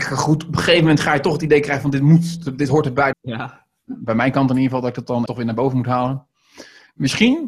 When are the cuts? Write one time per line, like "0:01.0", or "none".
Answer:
0:03.1
0:05.3